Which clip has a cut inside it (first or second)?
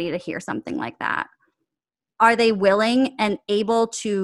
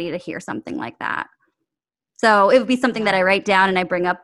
first